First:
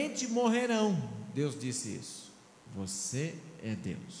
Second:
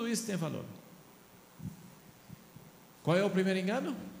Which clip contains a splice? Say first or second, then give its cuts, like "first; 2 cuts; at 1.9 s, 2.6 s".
first; 1 cut; at 2.7 s